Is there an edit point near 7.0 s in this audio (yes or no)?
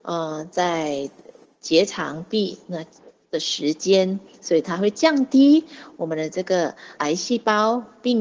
yes